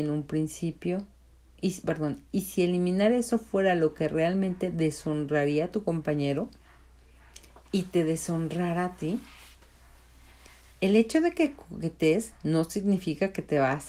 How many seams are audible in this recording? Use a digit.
1